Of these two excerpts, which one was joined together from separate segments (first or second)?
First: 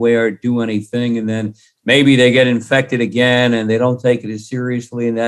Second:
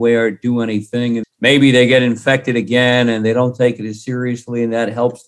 second